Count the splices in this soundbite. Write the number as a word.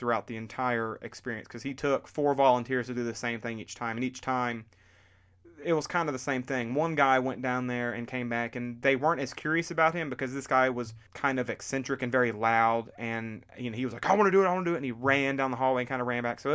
one